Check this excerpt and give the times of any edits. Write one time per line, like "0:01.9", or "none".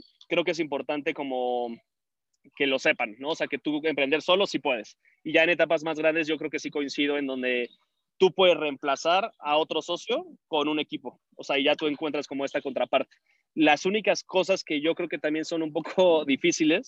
none